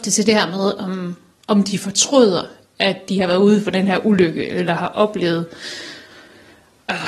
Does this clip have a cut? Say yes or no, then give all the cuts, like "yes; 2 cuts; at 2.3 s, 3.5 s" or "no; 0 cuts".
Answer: no; 0 cuts